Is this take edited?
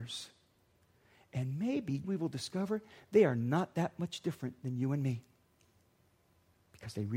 yes; 1 cut; at 2.0 s

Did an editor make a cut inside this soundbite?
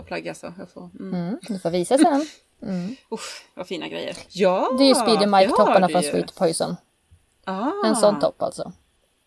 yes; 2 cuts; at 2.5 s, 4.3 s

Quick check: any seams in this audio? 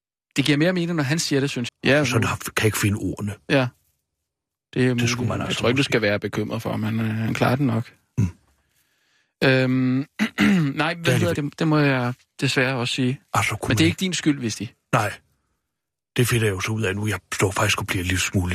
yes; 2 cuts; at 1.7 s, 11.4 s

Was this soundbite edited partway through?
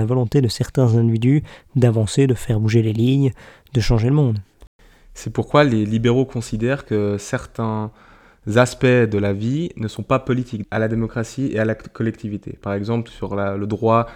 yes; 2 cuts; at 10.6 s, 13.1 s

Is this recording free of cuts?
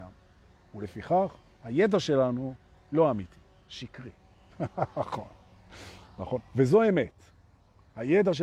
yes; 0 cuts

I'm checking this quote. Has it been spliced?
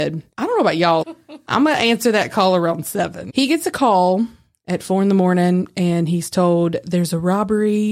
yes; 2 cuts; at 1.0 s, 3.3 s

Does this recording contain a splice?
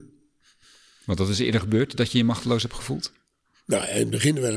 no; 0 cuts

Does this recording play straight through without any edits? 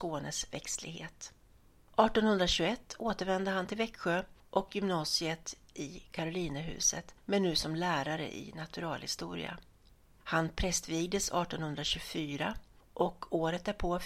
yes; 0 cuts

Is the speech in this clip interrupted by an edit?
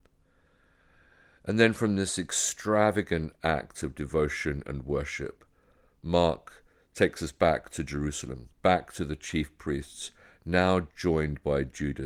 no; 0 cuts

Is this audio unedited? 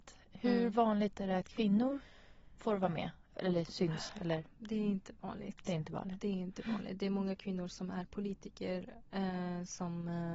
yes; 0 cuts

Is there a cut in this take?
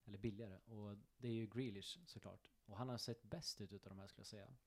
no; 0 cuts

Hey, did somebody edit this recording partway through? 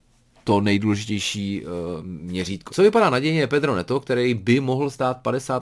yes; 1 cut; at 2.7 s

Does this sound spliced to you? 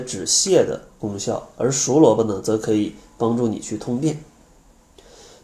no; 0 cuts

